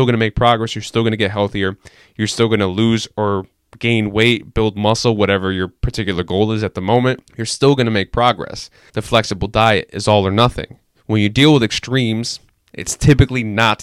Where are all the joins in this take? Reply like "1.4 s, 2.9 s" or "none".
7.3 s, 8.9 s

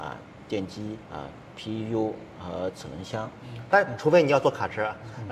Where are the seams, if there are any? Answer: 1.0 s, 3.7 s

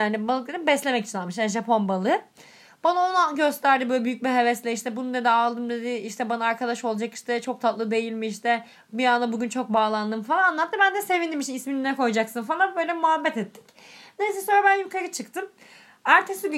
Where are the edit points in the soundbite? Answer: none

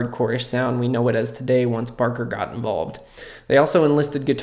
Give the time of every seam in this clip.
none

